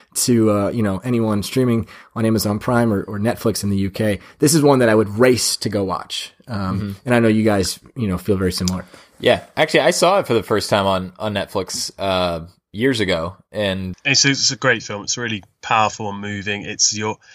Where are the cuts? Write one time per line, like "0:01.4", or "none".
0:13.9

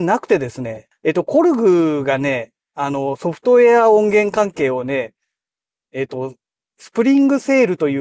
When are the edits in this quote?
0:00.9

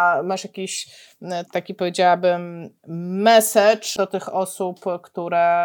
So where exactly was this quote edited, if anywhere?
0:01.5

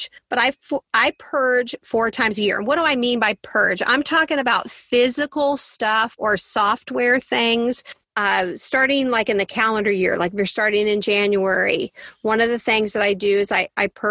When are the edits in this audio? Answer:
0:08.0

